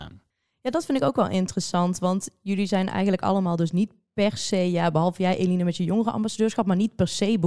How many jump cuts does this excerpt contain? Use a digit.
0